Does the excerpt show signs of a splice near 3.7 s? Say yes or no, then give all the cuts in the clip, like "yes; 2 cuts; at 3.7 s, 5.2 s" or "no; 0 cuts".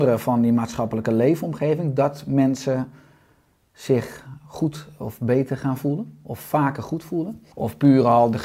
no; 1 cut; at 7.5 s